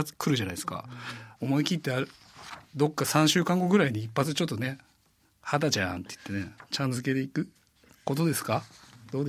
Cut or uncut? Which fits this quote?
cut